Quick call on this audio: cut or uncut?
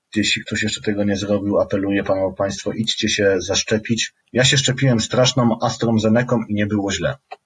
cut